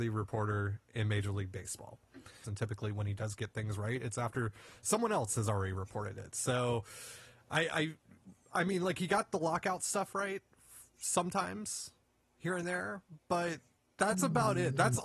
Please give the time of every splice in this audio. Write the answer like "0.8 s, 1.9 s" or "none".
2.4 s